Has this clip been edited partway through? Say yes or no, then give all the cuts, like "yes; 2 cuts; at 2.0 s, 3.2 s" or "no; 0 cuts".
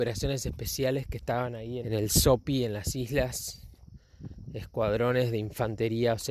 yes; 1 cut; at 1.8 s